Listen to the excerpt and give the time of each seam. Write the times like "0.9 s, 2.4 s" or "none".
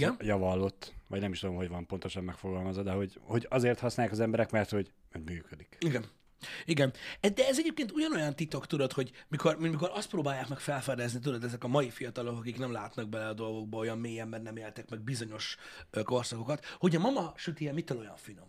none